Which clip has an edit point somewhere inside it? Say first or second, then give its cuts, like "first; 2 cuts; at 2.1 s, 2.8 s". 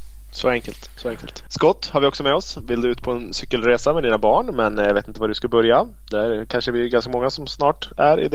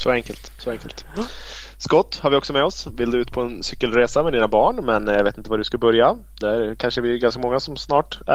first; 1 cut; at 1.5 s